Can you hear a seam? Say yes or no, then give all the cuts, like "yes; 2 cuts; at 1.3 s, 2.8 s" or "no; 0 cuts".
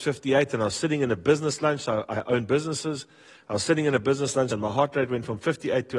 yes; 1 cut; at 4.5 s